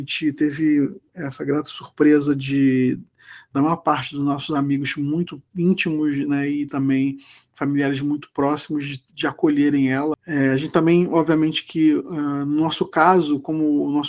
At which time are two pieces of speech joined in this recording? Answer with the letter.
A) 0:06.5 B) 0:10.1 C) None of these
B